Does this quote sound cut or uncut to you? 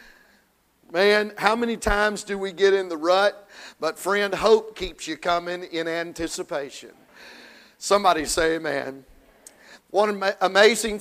cut